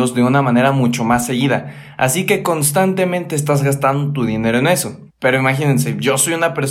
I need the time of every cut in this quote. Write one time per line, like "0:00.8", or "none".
0:05.1

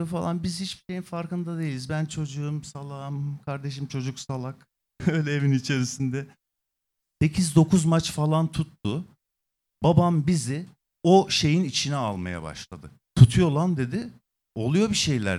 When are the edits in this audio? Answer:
none

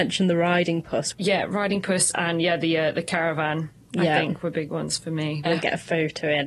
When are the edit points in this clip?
0:01.1
0:05.5

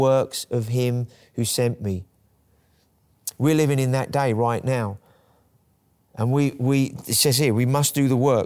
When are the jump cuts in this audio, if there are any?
none

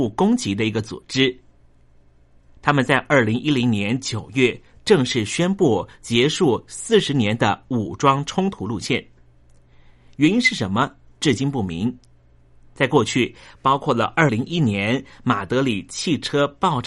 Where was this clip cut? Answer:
0:14.3

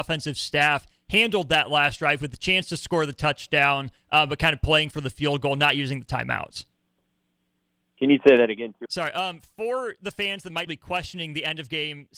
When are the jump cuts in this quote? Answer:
0:08.9
0:10.7

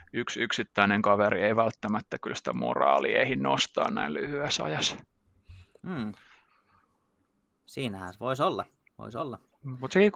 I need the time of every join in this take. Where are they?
0:05.8

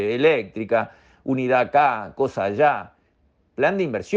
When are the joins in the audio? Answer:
none

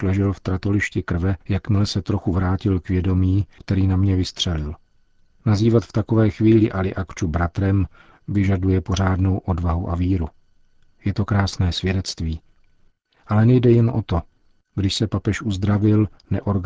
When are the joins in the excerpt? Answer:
0:01.4
0:03.6

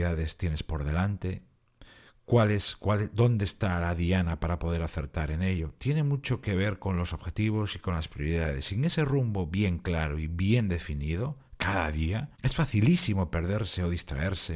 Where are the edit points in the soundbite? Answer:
0:12.3

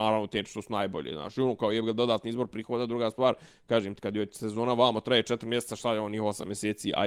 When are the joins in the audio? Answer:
none

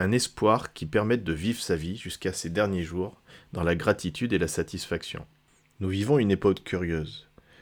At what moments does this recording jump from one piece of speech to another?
none

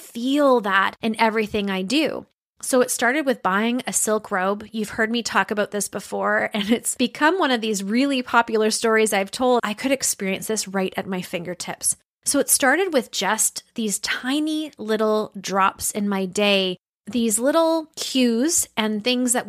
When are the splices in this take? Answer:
0:09.6

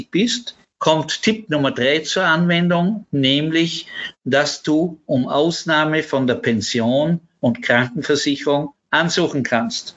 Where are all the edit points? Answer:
none

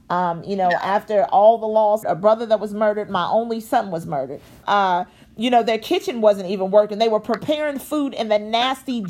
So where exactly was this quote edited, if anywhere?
0:02.0
0:04.6

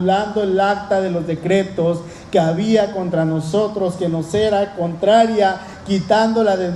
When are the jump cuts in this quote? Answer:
none

